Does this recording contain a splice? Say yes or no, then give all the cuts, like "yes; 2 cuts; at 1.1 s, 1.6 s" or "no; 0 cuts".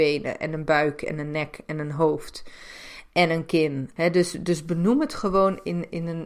no; 0 cuts